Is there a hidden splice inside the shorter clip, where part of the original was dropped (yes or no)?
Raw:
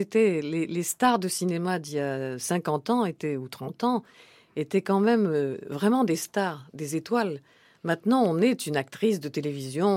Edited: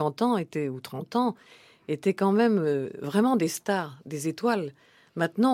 no